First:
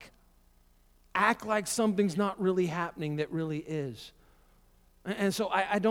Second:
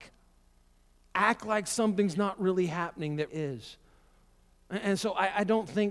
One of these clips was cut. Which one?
second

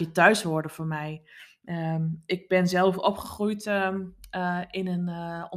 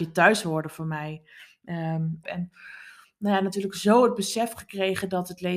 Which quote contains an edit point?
second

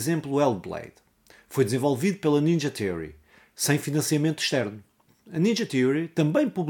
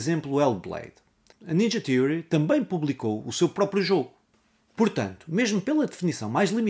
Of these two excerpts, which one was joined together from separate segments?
second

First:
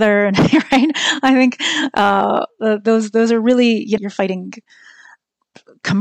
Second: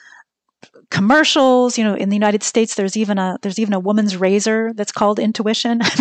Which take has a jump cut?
first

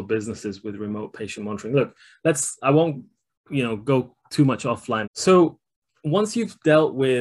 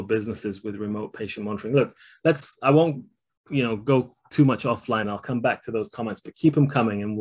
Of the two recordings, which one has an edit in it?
first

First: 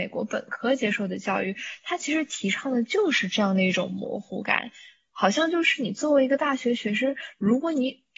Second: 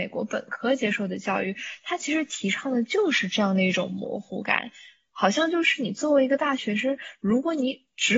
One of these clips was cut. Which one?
second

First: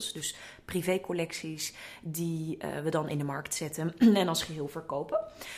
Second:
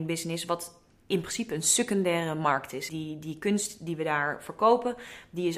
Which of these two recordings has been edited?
second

